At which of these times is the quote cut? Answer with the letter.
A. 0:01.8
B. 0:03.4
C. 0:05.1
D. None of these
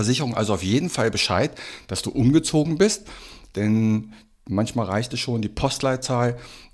D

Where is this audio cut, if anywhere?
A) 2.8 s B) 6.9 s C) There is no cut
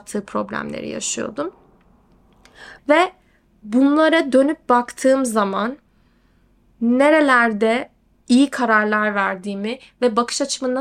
A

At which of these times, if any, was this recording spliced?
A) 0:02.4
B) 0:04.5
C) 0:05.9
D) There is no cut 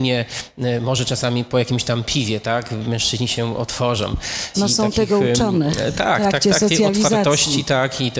B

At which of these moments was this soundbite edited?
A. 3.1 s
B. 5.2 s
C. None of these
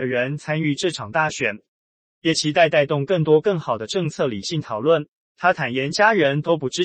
B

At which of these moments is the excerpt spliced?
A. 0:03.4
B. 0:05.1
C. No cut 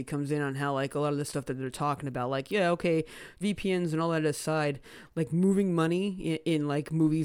A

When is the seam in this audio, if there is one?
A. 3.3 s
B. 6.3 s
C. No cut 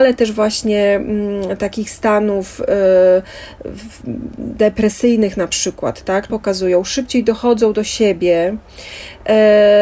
B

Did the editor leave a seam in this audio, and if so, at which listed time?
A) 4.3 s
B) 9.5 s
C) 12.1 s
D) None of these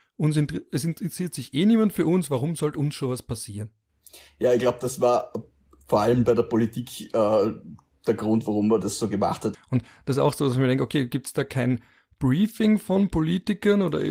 B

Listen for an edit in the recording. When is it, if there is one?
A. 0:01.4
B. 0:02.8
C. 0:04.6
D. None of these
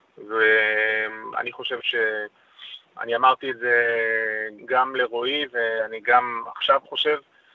C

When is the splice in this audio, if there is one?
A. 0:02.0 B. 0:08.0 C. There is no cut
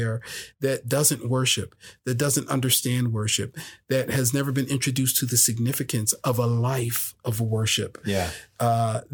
C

